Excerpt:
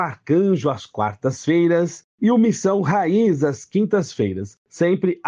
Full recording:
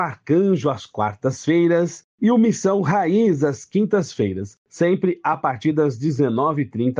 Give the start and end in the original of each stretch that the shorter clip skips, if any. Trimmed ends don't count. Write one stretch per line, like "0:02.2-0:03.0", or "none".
none